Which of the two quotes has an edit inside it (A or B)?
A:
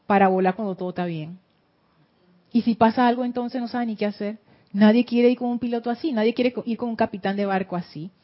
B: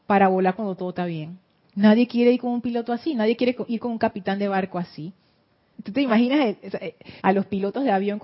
B